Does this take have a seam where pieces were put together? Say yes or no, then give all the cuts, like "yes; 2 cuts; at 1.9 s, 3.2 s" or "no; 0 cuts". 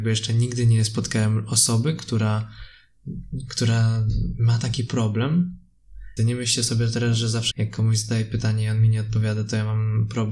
yes; 2 cuts; at 6.2 s, 7.5 s